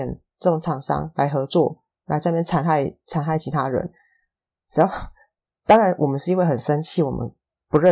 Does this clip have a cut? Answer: no; 0 cuts

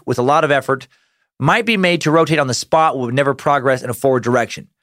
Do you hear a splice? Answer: no; 0 cuts

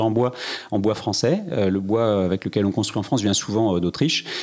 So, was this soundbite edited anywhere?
no; 0 cuts

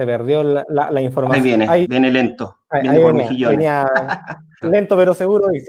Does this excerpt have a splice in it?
yes; 2 cuts; at 1.8 s, 4.6 s

